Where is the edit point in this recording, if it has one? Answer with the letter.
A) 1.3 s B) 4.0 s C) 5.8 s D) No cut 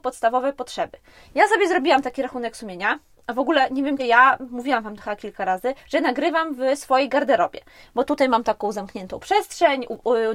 B